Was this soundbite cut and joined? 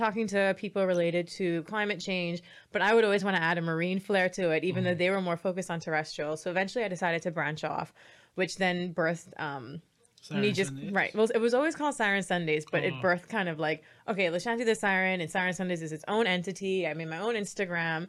no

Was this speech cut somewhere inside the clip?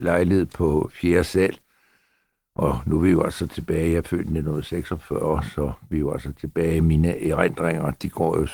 no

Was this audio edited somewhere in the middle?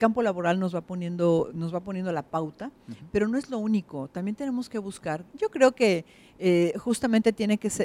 yes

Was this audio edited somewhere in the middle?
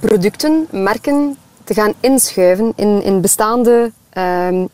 no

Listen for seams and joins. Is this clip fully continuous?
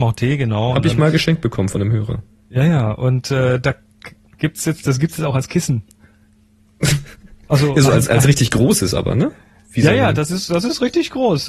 yes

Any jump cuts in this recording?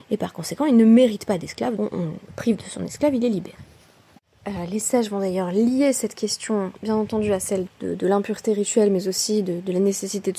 yes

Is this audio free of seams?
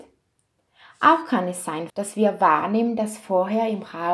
no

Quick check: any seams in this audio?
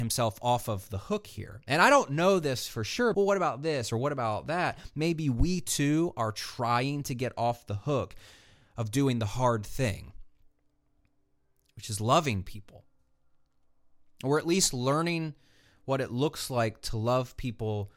yes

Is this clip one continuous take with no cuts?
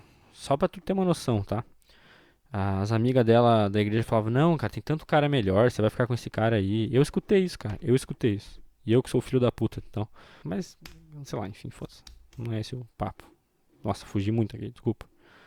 no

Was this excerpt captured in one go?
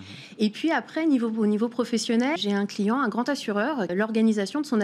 no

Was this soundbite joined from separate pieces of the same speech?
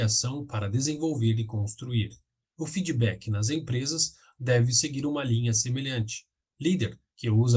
no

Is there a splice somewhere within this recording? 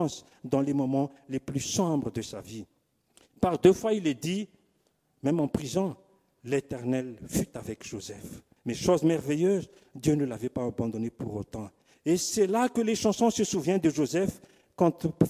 yes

